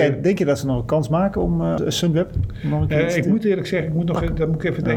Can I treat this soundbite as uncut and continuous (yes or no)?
no